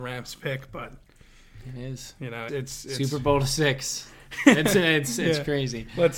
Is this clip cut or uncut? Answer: cut